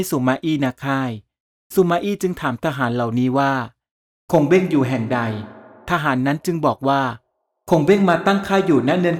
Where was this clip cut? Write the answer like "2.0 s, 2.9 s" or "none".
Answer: none